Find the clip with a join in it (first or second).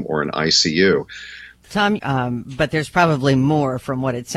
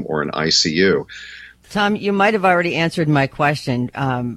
first